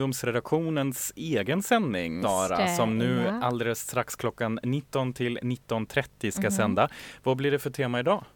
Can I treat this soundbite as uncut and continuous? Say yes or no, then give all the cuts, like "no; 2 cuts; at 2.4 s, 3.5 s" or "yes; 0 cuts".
no; 1 cut; at 2.2 s